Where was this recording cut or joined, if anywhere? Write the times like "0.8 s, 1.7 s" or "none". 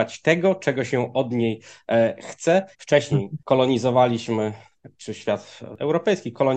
2.7 s